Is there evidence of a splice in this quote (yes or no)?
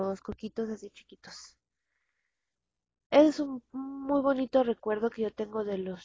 no